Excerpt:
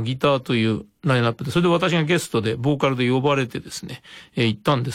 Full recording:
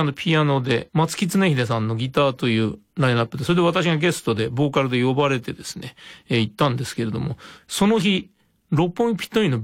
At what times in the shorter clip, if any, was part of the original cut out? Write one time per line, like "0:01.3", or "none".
none